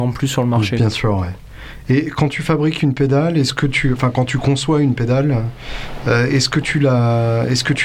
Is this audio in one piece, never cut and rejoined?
yes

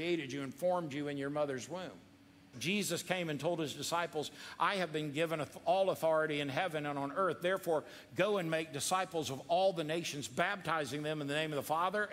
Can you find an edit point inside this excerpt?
yes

